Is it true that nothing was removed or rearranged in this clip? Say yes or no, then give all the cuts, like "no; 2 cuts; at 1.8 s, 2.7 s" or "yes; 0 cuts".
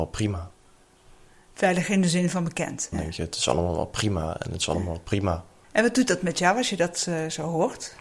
no; 1 cut; at 2.9 s